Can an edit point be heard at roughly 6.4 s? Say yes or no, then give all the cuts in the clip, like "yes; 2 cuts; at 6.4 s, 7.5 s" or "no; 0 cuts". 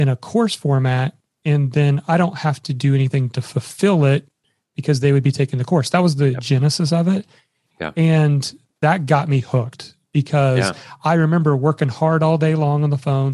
no; 0 cuts